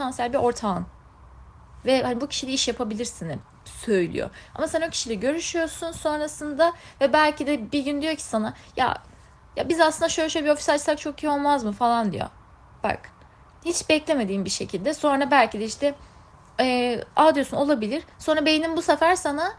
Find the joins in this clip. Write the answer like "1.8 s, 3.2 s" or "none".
none